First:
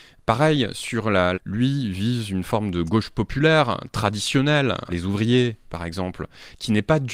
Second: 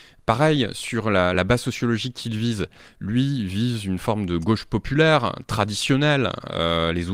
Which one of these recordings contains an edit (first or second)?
first